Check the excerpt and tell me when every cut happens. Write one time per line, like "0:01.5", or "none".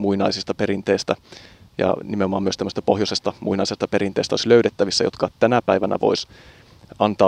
none